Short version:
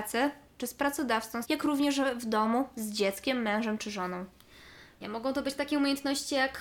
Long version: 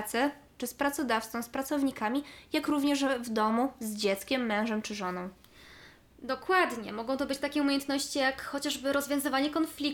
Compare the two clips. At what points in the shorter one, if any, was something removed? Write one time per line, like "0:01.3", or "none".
0:01.4
0:05.0